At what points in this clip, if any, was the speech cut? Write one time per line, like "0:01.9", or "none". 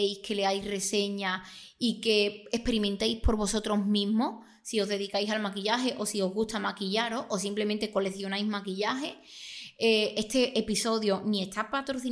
none